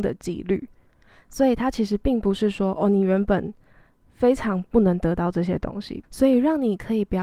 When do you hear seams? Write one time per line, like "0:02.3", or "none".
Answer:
0:06.0